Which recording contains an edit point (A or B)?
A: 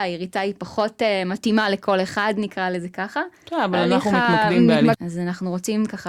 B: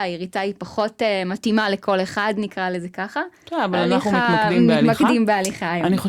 A